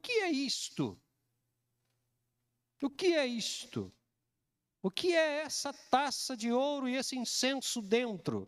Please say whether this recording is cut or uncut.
uncut